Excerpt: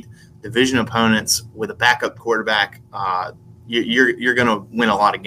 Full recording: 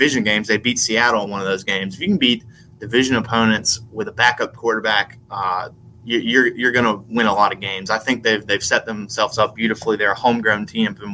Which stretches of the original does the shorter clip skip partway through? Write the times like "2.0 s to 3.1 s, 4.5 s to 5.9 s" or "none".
none